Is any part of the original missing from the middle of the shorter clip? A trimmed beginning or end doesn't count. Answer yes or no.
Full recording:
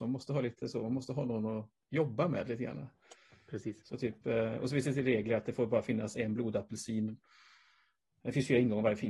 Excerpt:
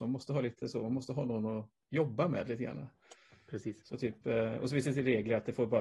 no